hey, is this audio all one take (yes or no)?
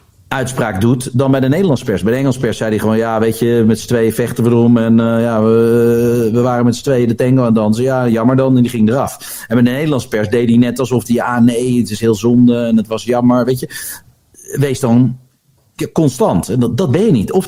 yes